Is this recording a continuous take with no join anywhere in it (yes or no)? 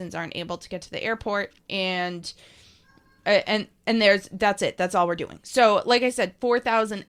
yes